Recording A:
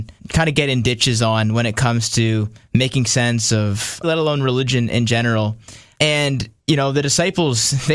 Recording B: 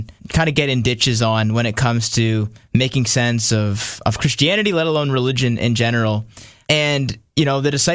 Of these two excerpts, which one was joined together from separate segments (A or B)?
A